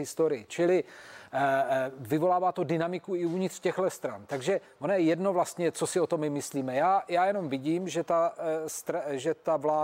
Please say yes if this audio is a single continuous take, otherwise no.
yes